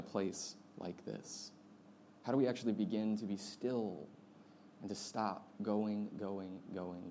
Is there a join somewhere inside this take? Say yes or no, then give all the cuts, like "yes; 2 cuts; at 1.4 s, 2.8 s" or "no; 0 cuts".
no; 0 cuts